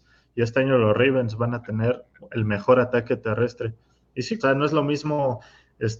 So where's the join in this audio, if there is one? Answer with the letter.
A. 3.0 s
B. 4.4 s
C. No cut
B